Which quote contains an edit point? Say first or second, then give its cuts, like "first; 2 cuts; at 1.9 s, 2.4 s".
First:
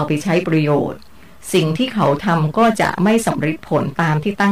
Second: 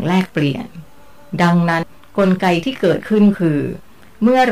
second; 1 cut; at 1.8 s